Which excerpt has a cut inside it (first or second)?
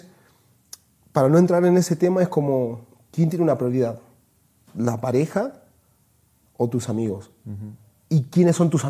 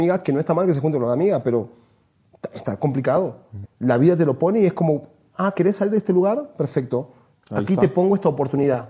second